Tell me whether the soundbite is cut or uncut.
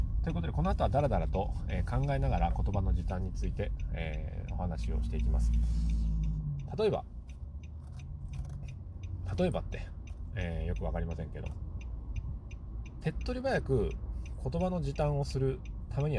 uncut